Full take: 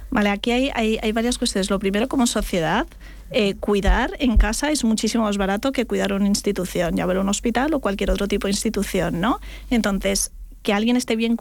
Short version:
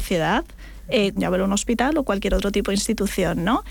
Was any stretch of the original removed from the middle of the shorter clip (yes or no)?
yes